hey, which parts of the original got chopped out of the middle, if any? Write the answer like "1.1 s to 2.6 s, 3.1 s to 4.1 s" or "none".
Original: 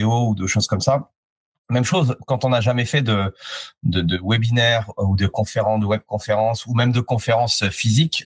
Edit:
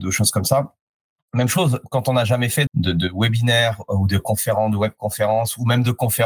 3.0 s to 3.8 s